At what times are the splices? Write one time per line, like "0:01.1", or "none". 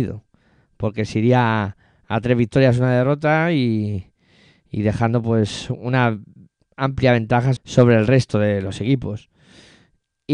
0:07.6